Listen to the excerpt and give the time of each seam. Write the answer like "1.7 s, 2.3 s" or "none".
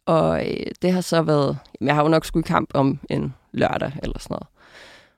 none